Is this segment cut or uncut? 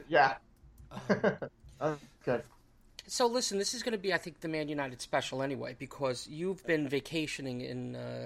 uncut